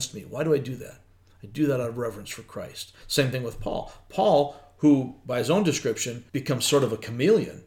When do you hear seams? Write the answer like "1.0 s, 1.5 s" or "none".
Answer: 3.0 s, 6.3 s